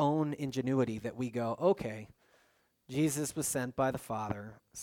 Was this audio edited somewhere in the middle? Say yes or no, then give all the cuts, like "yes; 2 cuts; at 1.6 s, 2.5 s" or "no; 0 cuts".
no; 0 cuts